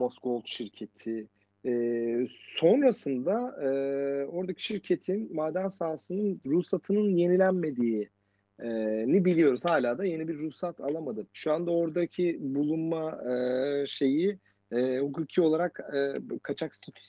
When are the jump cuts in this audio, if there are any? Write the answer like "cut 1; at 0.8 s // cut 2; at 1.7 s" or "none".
cut 1; at 11.3 s